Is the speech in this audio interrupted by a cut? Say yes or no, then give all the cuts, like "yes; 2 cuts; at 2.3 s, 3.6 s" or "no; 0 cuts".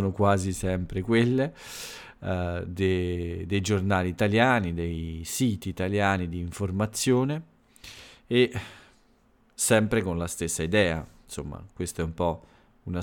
no; 0 cuts